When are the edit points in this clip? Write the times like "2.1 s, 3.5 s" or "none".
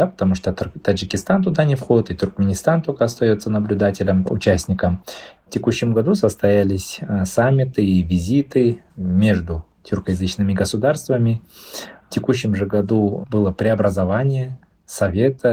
4.3 s, 5.4 s